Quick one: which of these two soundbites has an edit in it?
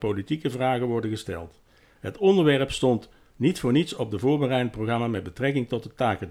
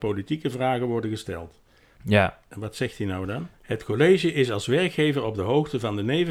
second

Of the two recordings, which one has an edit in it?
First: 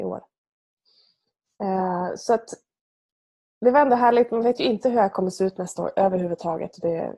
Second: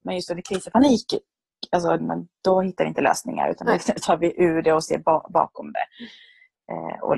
second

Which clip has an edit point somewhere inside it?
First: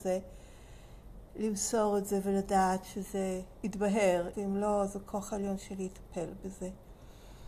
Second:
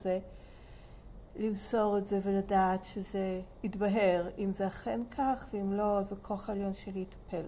first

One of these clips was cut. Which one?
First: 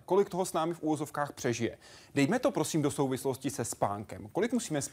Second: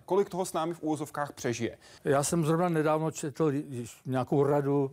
second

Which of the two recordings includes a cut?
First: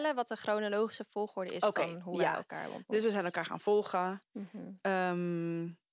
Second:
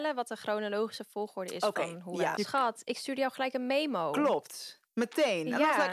second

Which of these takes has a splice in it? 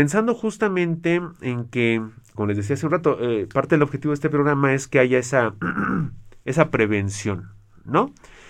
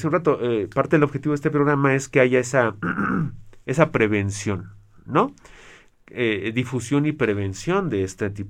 first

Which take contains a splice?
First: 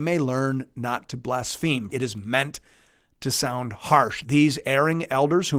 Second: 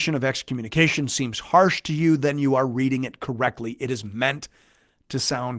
first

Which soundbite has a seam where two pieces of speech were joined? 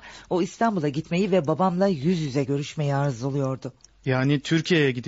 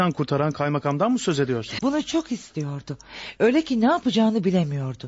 second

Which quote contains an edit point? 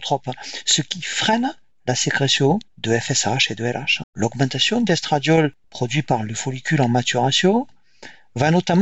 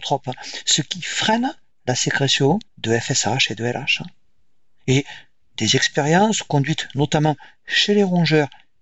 first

